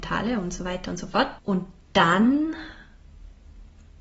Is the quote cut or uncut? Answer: cut